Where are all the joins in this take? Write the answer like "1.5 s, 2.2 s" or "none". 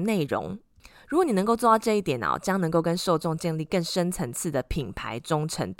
none